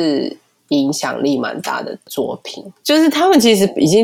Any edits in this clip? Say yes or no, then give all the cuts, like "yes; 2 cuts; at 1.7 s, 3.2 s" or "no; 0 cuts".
no; 0 cuts